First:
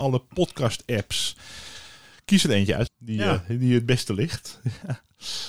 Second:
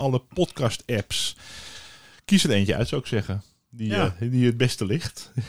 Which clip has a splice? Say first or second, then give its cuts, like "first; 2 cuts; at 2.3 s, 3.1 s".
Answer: first; 1 cut; at 2.9 s